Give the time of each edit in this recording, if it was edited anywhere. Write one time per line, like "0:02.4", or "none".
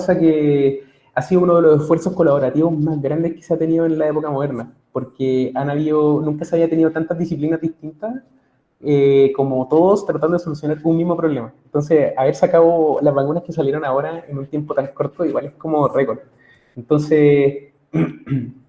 none